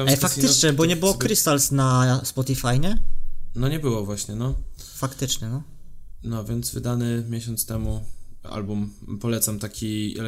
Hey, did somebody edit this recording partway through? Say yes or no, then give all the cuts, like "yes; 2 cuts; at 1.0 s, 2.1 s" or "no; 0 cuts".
no; 0 cuts